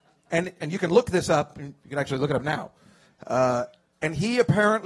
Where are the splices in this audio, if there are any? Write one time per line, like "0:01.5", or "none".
none